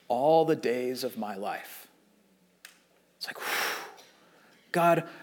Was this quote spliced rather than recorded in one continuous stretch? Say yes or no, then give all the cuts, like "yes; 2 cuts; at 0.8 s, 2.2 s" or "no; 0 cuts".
no; 0 cuts